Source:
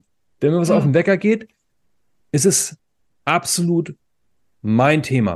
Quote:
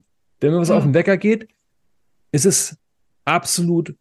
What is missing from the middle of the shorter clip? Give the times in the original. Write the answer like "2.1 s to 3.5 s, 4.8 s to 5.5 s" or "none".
none